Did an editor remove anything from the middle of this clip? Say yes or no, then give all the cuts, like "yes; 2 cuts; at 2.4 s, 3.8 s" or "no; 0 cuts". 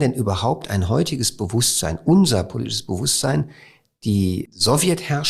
no; 0 cuts